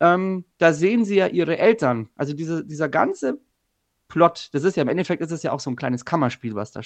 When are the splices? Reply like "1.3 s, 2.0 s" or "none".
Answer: none